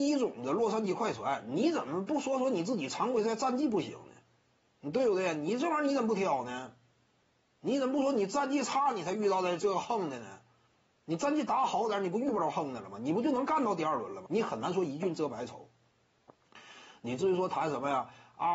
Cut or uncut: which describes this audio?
cut